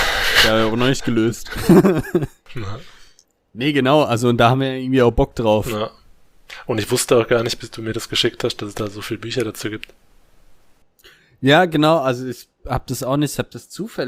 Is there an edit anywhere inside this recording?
no; 0 cuts

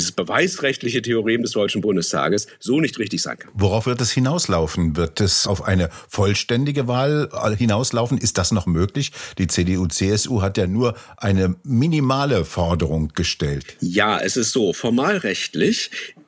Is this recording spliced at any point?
yes; 1 cut; at 5.4 s

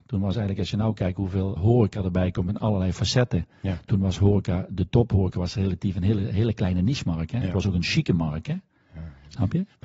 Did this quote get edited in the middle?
yes; 1 cut; at 1.6 s

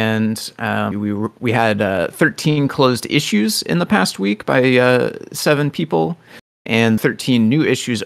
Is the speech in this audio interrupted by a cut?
yes; 2 cuts; at 0.9 s, 7.0 s

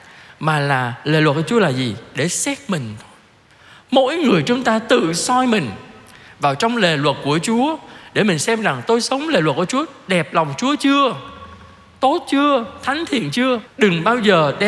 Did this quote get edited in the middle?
yes; 1 cut; at 13.6 s

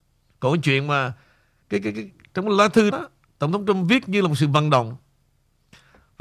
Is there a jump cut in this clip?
yes; 1 cut; at 2.9 s

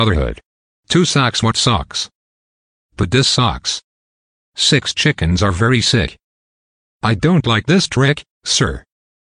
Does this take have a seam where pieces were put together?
yes; 2 cuts; at 4.5 s, 7.0 s

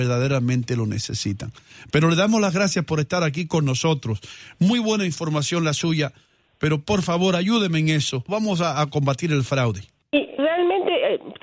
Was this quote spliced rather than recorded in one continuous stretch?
yes; 2 cuts; at 8.3 s, 10.4 s

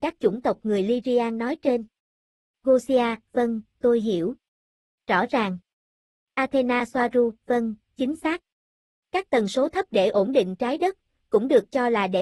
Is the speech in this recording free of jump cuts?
yes; 0 cuts

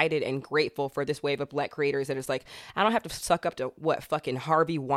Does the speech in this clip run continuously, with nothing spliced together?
yes; 0 cuts

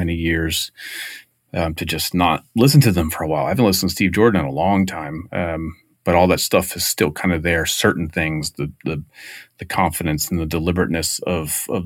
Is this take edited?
no; 0 cuts

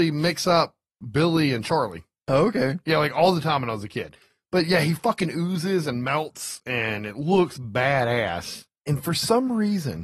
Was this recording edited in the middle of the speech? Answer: no; 0 cuts

